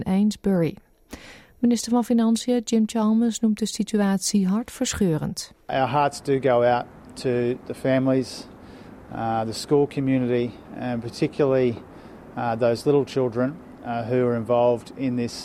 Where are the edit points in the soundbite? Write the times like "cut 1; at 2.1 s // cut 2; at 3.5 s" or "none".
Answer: none